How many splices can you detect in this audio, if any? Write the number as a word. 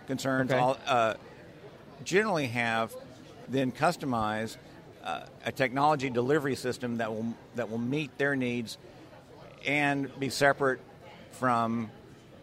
two